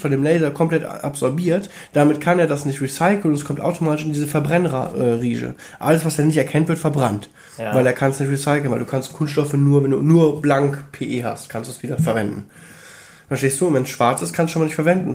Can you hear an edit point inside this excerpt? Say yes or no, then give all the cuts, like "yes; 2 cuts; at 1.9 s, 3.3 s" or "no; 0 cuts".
no; 0 cuts